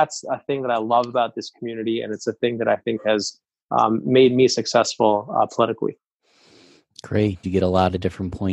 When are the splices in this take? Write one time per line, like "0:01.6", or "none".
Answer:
0:07.4